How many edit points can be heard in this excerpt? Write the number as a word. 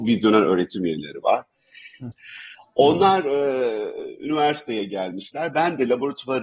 one